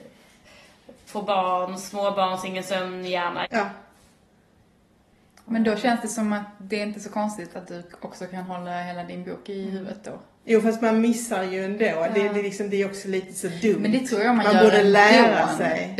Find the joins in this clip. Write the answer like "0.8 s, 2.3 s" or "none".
1.1 s, 3.4 s